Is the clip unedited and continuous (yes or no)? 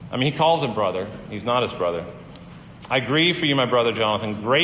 yes